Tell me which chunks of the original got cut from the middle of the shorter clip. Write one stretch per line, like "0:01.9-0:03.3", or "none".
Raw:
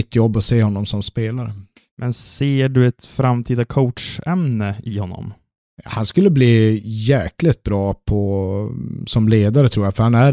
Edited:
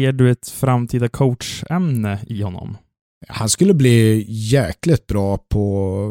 none